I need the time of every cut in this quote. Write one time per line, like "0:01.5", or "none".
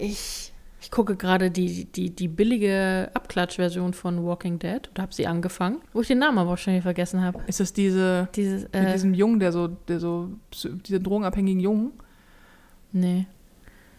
0:05.8